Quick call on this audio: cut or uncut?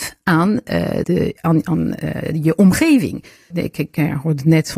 cut